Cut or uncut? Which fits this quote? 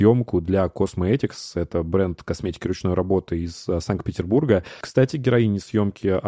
cut